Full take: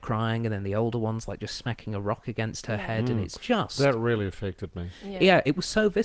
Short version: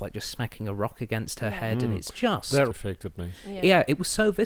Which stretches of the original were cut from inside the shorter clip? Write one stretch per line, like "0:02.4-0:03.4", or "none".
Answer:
0:04.0-0:04.3